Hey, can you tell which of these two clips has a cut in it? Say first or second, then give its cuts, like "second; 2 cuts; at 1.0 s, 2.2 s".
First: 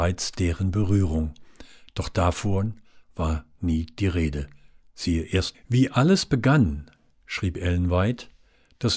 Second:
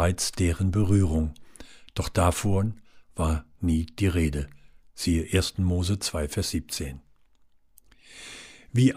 first; 1 cut; at 5.5 s